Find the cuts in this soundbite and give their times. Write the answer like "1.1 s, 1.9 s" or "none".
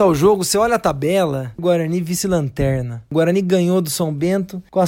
1.6 s